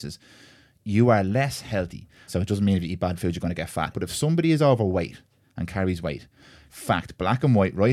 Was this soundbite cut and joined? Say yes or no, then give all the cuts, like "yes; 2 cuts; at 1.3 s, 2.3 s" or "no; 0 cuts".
yes; 3 cuts; at 2.3 s, 3.9 s, 6.7 s